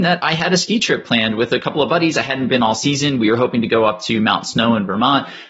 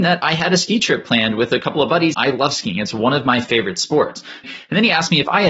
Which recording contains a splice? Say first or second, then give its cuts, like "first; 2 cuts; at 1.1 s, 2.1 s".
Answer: second; 2 cuts; at 2.1 s, 4.4 s